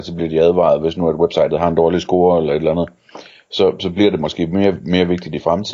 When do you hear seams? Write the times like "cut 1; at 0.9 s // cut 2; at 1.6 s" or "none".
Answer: none